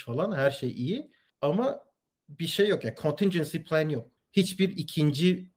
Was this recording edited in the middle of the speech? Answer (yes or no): yes